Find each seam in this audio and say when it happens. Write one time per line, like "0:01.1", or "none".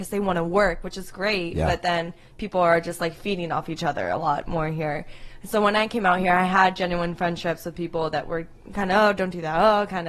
none